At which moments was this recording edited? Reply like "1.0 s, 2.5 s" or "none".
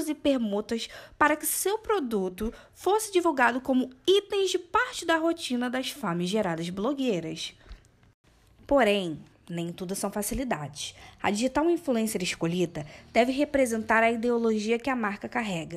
none